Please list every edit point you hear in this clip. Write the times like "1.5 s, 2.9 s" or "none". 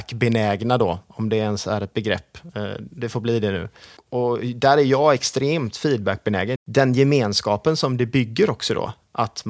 6.6 s